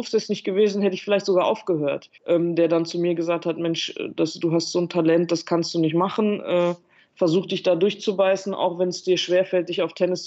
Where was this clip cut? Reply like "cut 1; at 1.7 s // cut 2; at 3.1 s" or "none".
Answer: cut 1; at 2.2 s